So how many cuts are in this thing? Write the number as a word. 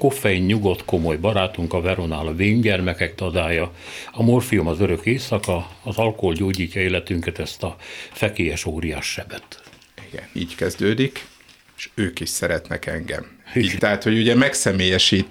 two